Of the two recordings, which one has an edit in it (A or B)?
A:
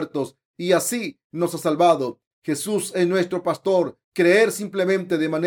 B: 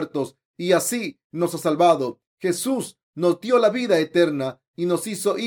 A